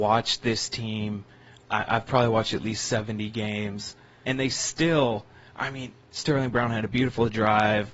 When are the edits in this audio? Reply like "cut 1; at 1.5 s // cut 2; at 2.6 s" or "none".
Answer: cut 1; at 4.2 s // cut 2; at 6.0 s